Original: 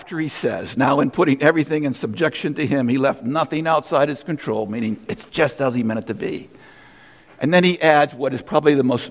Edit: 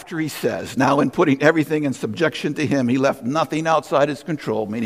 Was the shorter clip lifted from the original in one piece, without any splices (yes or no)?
yes